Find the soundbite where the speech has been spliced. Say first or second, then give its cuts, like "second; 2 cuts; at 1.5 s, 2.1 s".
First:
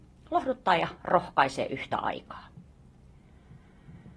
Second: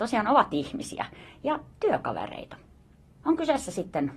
second; 1 cut; at 3.2 s